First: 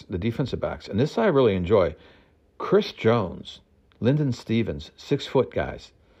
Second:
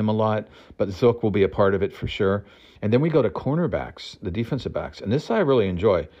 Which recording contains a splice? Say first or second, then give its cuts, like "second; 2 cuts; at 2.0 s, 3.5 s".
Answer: second; 1 cut; at 2.8 s